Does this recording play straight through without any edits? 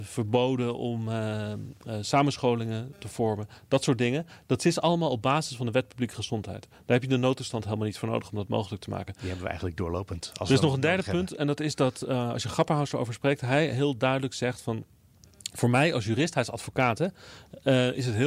yes; 0 cuts

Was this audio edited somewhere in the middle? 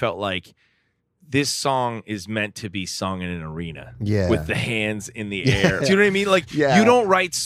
yes; 1 cut; at 5.8 s

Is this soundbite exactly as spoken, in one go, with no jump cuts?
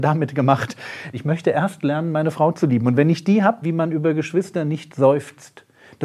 no; 2 cuts; at 1.1 s, 3.6 s

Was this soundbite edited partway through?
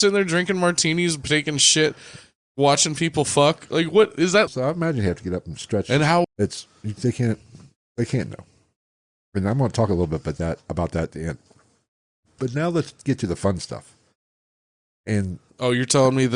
yes; 2 cuts; at 4.5 s, 6.2 s

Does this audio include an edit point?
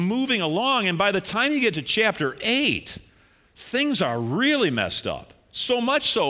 no; 0 cuts

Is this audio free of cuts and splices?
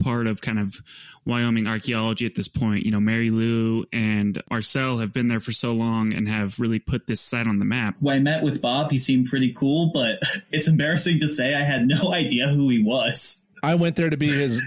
no; 2 cuts; at 7.9 s, 13.6 s

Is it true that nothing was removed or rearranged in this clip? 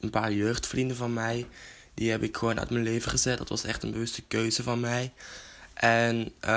yes; 0 cuts

